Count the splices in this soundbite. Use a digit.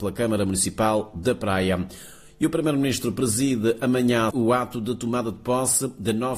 1